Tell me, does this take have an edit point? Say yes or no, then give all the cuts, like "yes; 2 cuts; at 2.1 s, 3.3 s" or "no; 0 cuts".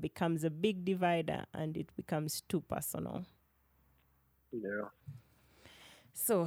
no; 0 cuts